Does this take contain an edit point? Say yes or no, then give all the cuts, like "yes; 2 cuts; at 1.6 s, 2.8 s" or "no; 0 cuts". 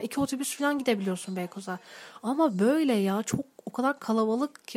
no; 0 cuts